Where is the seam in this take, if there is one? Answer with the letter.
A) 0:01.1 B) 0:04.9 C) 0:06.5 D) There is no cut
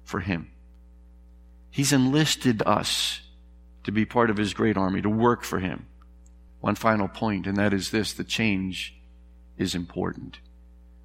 C